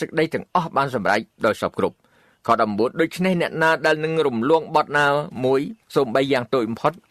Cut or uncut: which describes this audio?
cut